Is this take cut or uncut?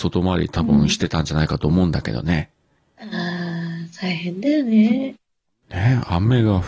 uncut